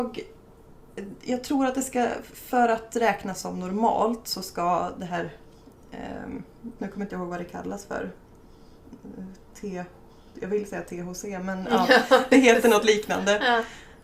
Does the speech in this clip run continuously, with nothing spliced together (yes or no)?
no